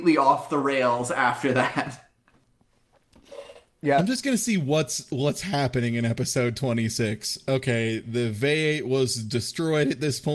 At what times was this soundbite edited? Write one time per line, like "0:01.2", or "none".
none